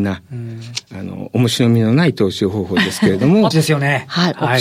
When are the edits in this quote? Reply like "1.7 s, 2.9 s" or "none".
3.5 s

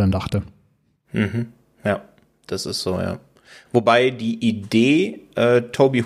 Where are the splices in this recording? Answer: none

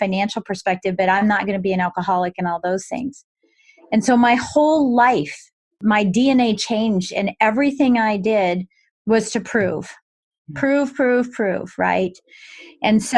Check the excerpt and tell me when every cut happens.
none

